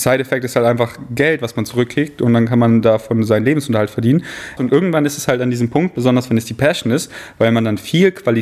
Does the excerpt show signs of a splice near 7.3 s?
no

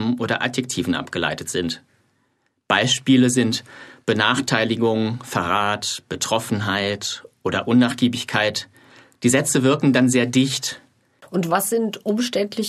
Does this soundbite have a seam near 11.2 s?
yes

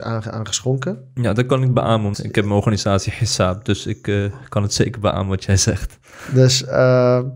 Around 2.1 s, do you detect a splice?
yes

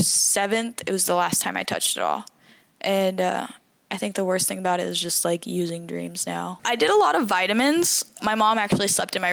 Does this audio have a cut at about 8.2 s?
yes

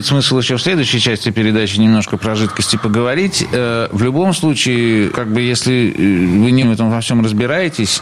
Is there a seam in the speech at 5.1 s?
yes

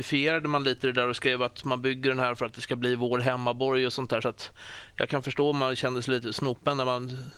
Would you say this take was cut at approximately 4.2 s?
no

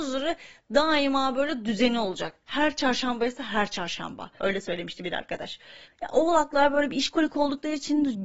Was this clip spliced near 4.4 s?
yes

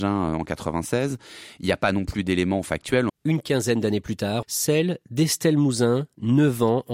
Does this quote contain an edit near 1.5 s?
no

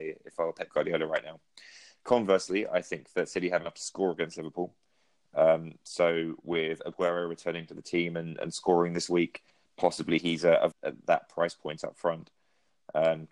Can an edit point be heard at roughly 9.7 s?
yes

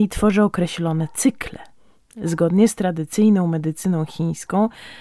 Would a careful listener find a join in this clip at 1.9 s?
no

